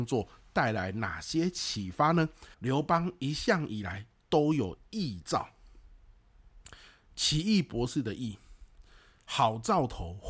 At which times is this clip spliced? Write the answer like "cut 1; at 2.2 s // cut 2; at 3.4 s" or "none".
cut 1; at 2.5 s